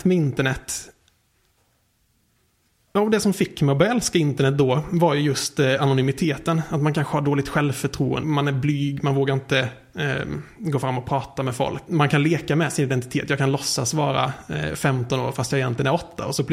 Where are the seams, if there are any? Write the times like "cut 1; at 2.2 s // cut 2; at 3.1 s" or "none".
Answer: cut 1; at 8.2 s // cut 2; at 11.9 s